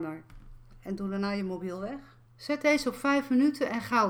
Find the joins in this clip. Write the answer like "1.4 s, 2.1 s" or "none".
2.2 s